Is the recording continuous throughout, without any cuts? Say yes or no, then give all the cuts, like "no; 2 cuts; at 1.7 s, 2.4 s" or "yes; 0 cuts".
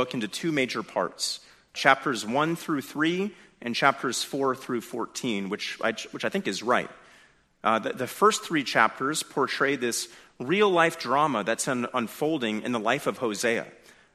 yes; 0 cuts